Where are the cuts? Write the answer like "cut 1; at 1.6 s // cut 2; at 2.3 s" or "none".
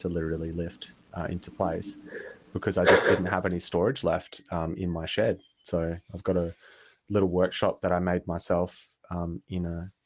none